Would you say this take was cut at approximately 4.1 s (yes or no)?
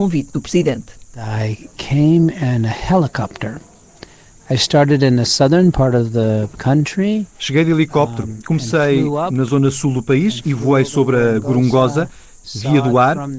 no